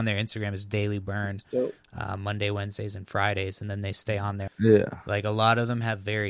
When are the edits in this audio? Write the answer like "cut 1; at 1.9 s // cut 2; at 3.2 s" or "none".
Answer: cut 1; at 4.5 s

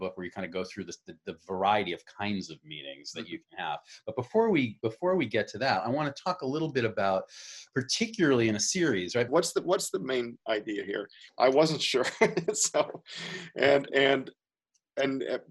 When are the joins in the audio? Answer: cut 1; at 9.3 s // cut 2; at 11.3 s

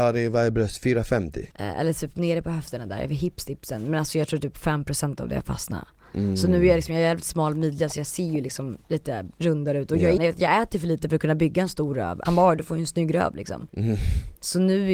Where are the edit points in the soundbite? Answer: cut 1; at 1.5 s // cut 2; at 10.2 s // cut 3; at 12.2 s

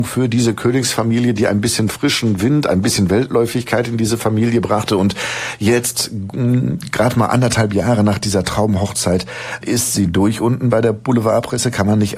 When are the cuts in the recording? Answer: none

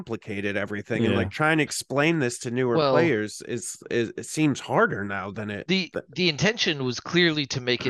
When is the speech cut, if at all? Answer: none

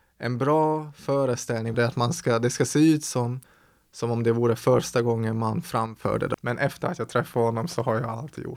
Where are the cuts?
cut 1; at 1.7 s // cut 2; at 6.3 s

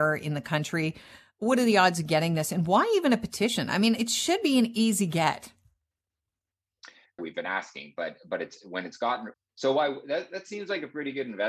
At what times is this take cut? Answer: cut 1; at 7.2 s // cut 2; at 9.3 s

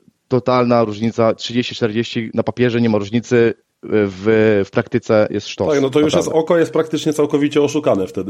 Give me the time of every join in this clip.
none

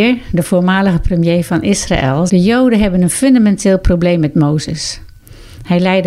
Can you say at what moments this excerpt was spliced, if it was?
cut 1; at 2.3 s

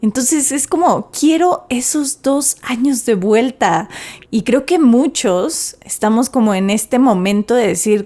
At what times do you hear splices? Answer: cut 1; at 4.2 s

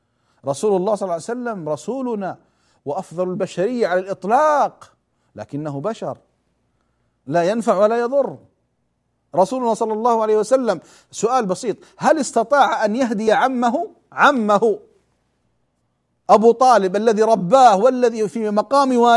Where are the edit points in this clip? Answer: none

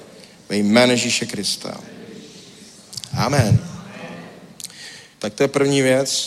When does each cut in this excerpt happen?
cut 1; at 5.1 s

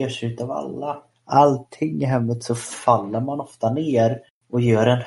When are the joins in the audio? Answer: cut 1; at 1.1 s

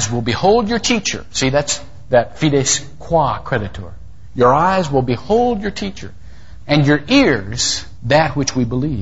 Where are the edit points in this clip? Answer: cut 1; at 6.6 s // cut 2; at 8.0 s

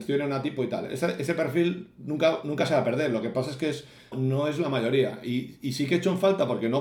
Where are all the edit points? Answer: cut 1; at 4.1 s

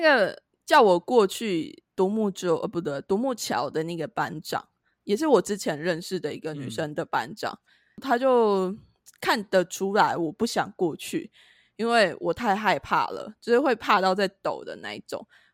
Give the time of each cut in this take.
none

